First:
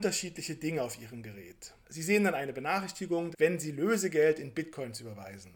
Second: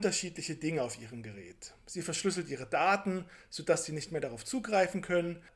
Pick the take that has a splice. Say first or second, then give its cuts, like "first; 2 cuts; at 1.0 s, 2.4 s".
first; 2 cuts; at 1.8 s, 3.3 s